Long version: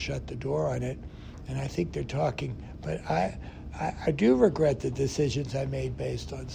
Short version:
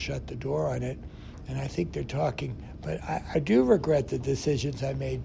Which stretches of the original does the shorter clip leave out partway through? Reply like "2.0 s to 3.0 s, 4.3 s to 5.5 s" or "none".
3.0 s to 3.7 s